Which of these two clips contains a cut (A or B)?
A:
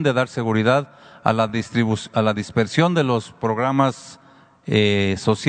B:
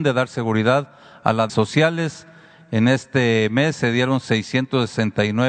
B